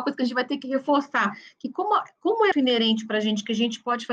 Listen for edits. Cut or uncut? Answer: cut